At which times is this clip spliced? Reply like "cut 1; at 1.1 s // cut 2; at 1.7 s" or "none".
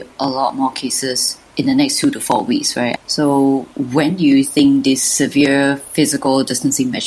cut 1; at 3.0 s